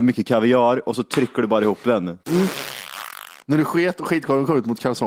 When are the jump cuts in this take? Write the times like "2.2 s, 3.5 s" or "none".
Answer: 2.2 s, 3.4 s

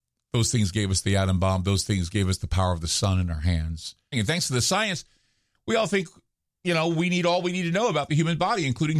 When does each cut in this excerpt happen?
4.1 s

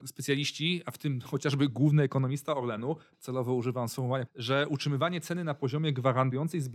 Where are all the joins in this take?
3.1 s, 4.3 s

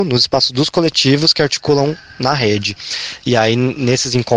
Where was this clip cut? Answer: none

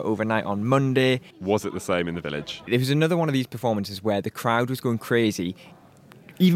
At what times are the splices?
1.3 s, 2.7 s

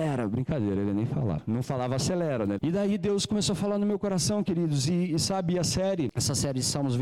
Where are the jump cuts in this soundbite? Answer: 2.6 s

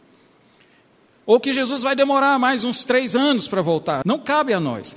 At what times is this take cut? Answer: 4.0 s

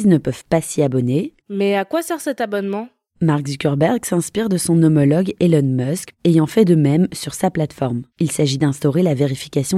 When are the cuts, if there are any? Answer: 1.4 s, 6.1 s, 8.1 s

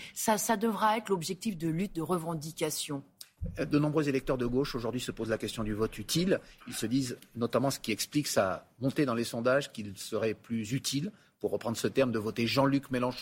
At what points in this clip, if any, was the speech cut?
none

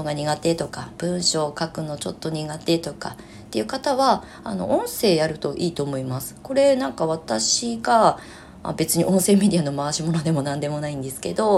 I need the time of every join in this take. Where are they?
none

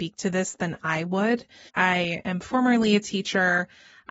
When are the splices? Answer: 1.7 s

